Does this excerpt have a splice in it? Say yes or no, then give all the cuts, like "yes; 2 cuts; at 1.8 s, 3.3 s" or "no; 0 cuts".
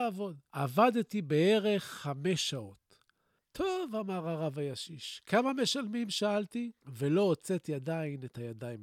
yes; 1 cut; at 3.4 s